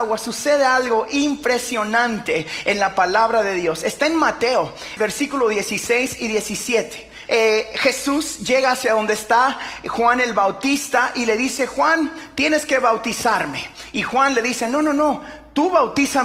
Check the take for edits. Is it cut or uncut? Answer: cut